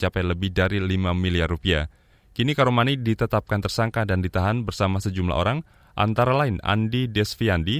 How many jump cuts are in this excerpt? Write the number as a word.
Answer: zero